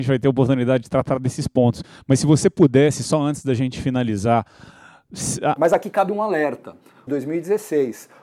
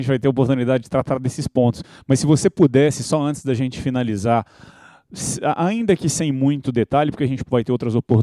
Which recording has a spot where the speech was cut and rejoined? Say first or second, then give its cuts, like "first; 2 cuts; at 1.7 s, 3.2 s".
first; 2 cuts; at 5.6 s, 7.1 s